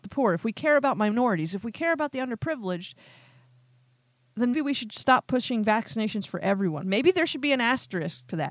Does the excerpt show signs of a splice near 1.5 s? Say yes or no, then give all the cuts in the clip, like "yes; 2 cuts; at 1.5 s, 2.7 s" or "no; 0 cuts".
no; 2 cuts; at 4.5 s, 6.8 s